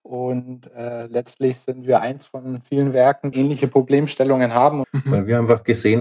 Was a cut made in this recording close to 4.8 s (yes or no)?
yes